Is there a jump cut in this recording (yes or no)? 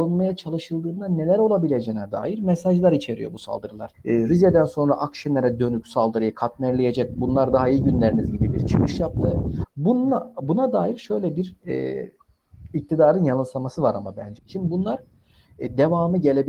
yes